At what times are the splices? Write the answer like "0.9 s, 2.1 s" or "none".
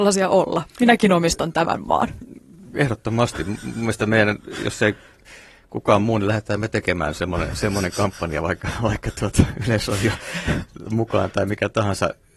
none

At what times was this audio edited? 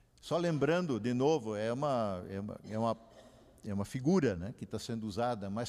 none

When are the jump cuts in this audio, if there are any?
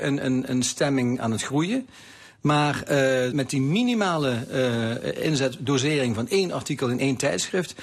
3.3 s

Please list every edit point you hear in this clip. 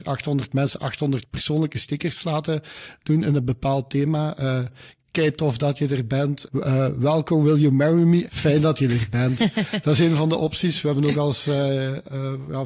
6.5 s, 8.3 s

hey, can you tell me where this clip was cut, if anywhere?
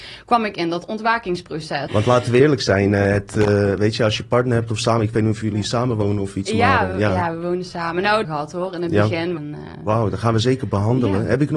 1.9 s, 8.2 s, 9.4 s

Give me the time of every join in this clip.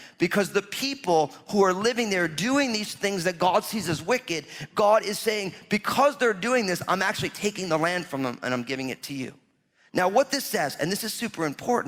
none

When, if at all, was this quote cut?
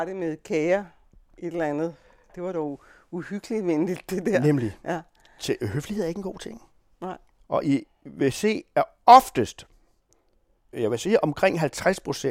7.4 s

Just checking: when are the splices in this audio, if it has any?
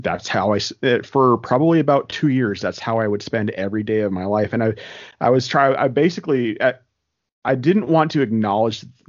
none

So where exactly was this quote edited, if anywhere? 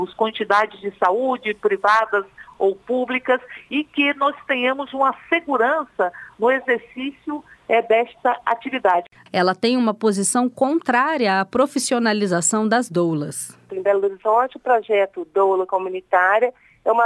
9.3 s

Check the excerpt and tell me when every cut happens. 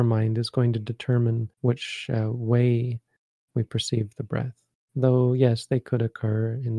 1.5 s, 4.8 s

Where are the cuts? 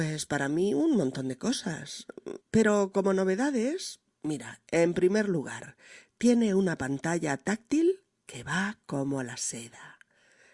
2.4 s

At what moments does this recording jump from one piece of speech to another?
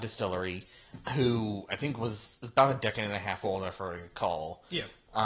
1.0 s, 2.8 s

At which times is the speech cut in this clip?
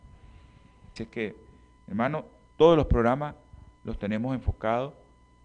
1.0 s

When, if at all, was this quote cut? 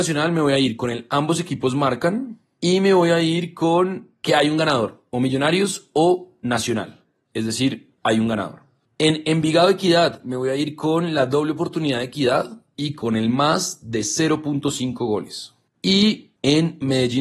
8.0 s, 15.7 s

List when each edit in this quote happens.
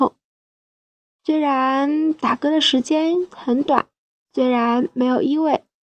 1.1 s

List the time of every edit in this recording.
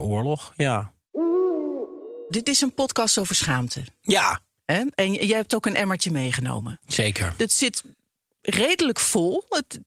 none

